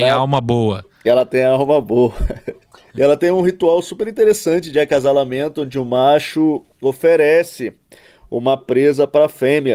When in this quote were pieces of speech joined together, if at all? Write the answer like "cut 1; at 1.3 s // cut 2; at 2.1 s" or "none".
cut 1; at 2.9 s